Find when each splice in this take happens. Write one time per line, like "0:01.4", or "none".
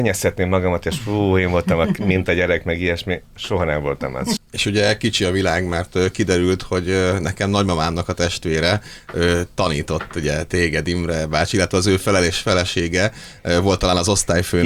0:04.4